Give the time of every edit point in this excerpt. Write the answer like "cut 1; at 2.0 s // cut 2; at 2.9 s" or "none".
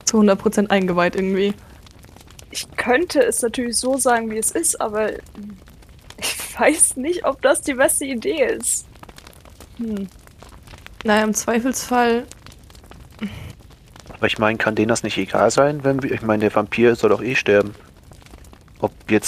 none